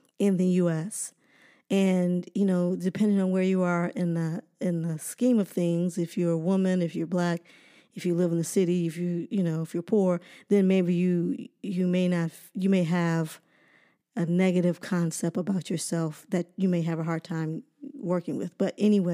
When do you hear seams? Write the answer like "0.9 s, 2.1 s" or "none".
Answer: none